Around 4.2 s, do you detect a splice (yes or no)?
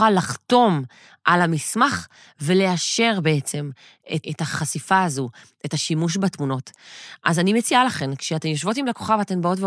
yes